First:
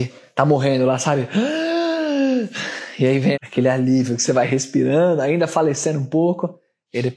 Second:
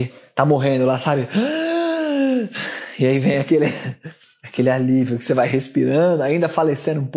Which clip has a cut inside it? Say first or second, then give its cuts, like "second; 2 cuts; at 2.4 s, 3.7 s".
first; 1 cut; at 3.3 s